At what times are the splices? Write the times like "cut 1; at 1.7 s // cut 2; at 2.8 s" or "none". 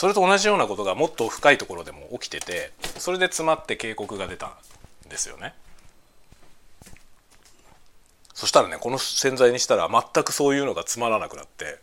none